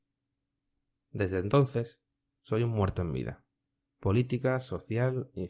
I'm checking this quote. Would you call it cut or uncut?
uncut